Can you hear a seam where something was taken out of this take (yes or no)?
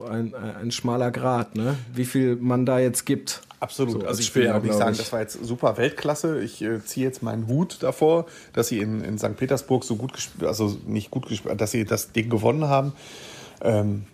no